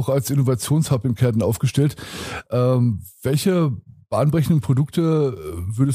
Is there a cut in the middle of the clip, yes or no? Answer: no